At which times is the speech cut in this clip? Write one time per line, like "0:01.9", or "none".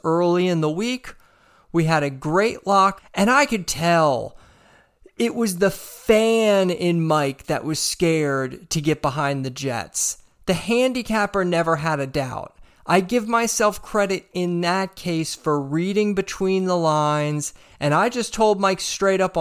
0:03.0

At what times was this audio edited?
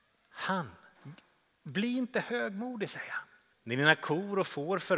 0:03.5

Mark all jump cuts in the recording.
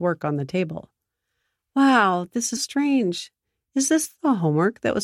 0:02.6

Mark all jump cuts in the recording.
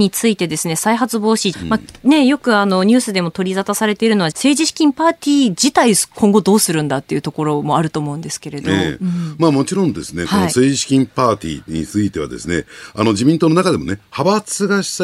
0:01.5
0:04.3

